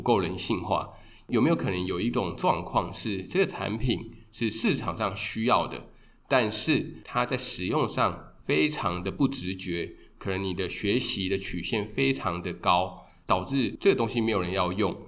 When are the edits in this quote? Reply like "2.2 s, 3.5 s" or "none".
none

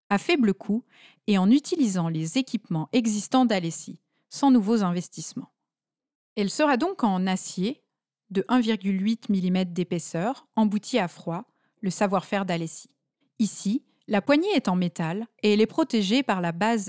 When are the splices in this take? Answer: 13.2 s

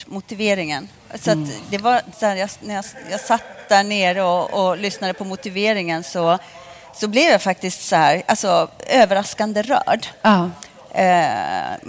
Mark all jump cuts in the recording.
2.1 s

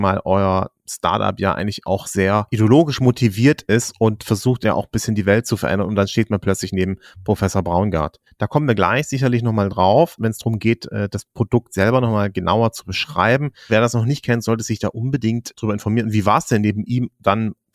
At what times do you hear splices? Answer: 8.3 s, 13.7 s

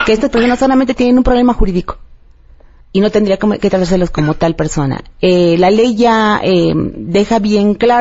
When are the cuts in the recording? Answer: 2.8 s

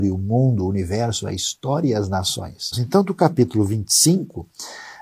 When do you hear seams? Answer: 2.7 s

